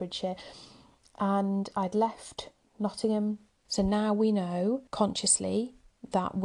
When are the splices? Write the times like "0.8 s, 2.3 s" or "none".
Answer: 3.7 s, 4.9 s